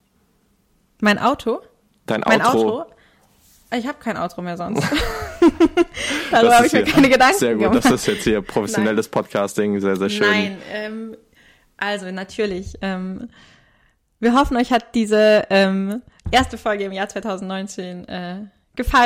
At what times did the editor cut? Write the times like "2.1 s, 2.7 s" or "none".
none